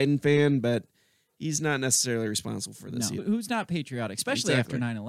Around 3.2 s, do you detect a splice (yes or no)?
yes